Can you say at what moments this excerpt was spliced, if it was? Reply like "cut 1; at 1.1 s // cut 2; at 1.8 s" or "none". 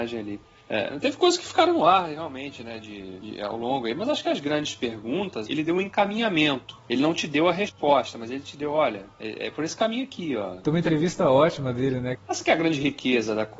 cut 1; at 5.5 s // cut 2; at 10.6 s // cut 3; at 12.2 s